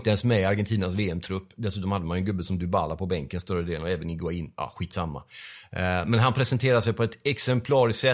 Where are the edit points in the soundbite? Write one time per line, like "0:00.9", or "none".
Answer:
none